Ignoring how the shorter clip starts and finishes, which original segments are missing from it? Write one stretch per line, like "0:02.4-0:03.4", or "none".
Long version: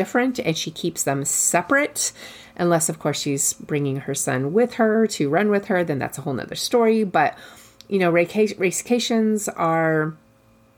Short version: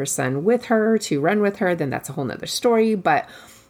none

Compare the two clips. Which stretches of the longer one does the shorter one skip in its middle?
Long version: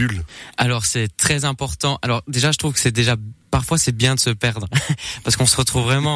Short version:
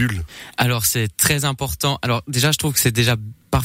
none

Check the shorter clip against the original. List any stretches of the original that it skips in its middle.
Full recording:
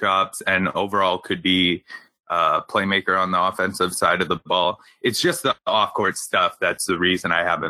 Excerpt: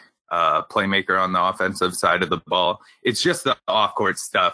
none

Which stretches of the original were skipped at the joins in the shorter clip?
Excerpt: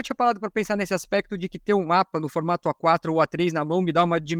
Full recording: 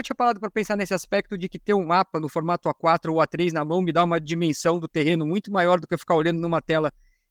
none

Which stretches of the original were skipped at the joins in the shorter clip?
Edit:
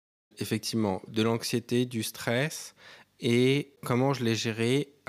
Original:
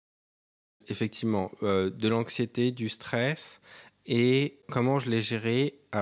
0:01.6-0:01.9

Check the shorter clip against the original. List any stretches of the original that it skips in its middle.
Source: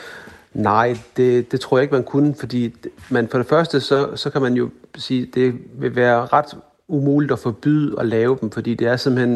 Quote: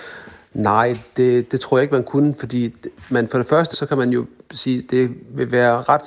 0:03.7-0:04.1

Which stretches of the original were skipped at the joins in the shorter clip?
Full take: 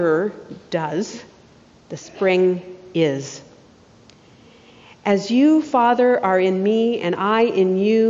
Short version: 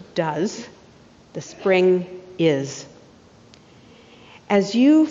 none

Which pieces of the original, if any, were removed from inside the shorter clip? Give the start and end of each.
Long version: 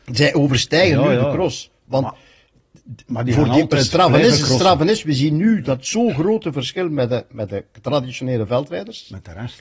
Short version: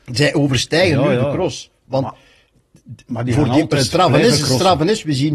none

